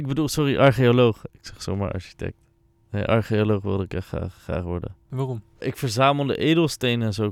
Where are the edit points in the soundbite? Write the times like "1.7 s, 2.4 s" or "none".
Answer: 4.4 s, 5.6 s